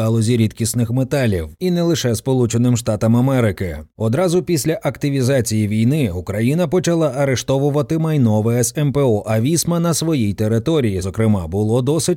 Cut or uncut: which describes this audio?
cut